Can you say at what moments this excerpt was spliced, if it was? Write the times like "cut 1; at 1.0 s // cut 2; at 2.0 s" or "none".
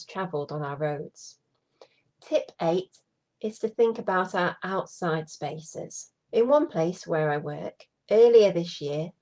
cut 1; at 2.1 s // cut 2; at 6.2 s